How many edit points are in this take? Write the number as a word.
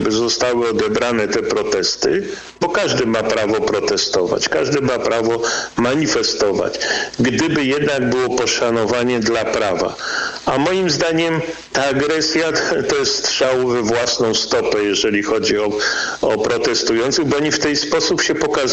zero